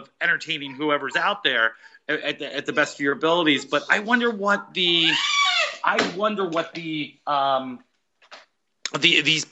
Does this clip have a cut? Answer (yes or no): no